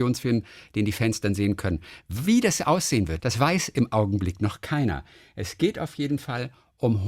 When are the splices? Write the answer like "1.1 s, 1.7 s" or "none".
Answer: 3.2 s